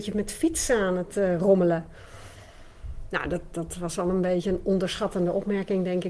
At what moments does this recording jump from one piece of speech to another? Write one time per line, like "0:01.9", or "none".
none